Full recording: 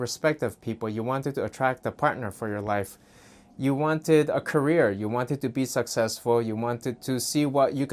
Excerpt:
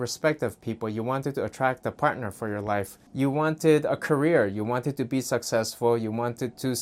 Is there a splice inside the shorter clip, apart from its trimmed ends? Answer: yes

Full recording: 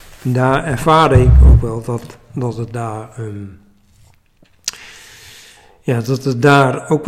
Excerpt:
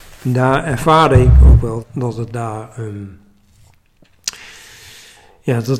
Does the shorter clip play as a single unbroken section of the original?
no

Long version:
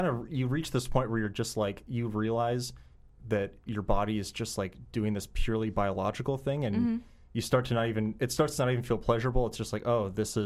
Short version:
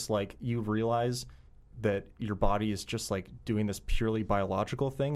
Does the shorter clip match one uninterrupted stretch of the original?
yes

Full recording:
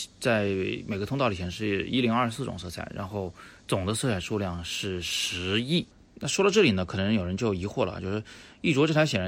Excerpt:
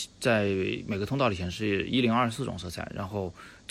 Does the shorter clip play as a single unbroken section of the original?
yes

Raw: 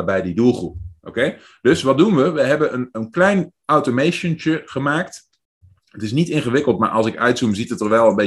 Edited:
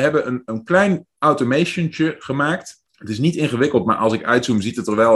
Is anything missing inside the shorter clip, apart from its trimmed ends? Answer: yes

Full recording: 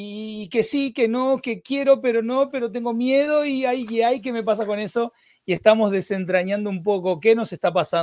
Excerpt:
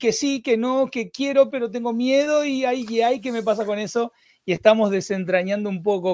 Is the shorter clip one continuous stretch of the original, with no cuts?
no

